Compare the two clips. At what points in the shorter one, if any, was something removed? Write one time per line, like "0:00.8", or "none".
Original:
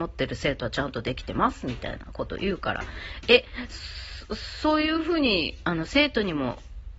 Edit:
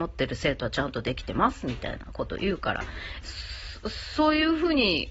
0:03.2